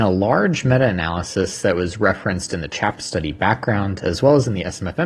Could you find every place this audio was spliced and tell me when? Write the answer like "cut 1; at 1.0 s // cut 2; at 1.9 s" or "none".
none